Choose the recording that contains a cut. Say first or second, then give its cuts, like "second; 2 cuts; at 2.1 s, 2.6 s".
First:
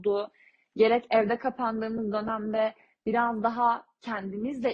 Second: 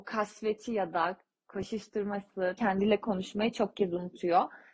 second; 1 cut; at 2.6 s